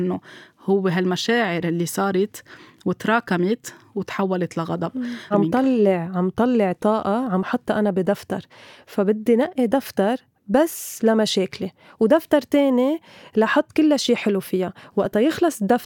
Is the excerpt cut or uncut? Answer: cut